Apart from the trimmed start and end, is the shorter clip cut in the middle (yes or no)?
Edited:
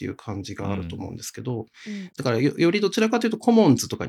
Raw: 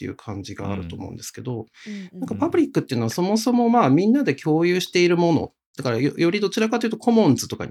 yes